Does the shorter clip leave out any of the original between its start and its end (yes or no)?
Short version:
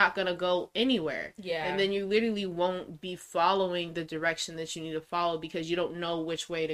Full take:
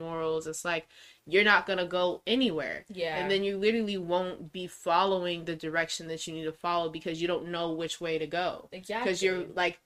no